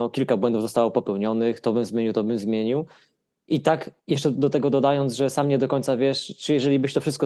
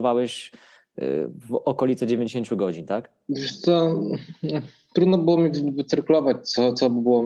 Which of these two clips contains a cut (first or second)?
first